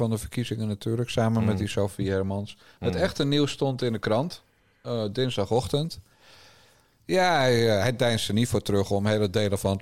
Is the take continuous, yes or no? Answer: yes